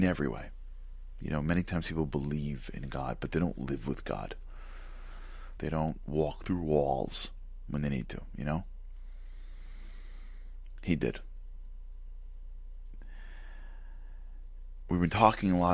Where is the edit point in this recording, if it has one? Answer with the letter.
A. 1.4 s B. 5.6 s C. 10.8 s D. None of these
B